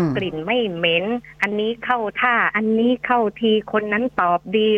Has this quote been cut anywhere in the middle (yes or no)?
yes